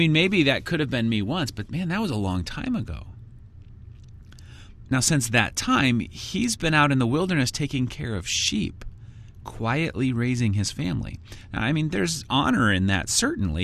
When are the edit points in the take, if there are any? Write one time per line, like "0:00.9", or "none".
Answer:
0:04.9